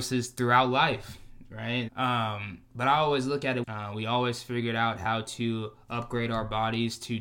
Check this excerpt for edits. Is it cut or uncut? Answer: cut